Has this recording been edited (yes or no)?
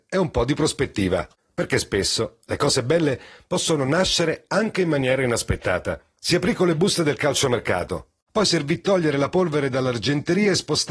yes